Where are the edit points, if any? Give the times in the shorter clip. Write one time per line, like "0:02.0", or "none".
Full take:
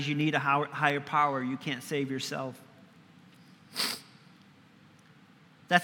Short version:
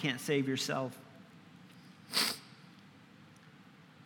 none